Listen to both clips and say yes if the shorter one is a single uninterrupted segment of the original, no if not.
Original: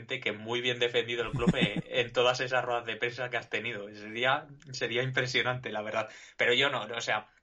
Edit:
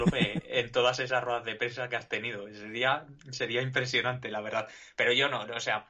yes